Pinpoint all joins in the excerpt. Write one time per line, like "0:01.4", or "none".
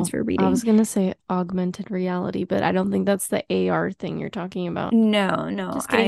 none

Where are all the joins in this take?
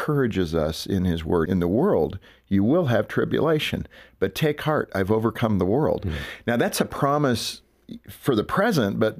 0:01.5

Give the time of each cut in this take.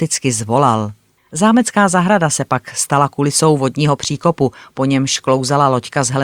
0:01.2

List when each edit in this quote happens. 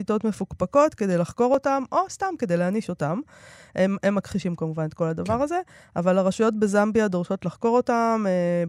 none

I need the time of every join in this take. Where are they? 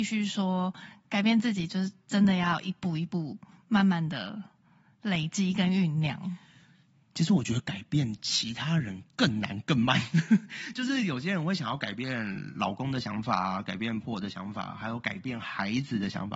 0:14.0

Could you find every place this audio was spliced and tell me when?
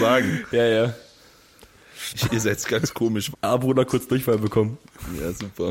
0:02.1
0:03.3

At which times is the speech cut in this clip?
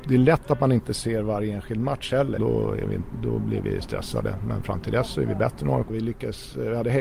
0:02.4
0:05.9

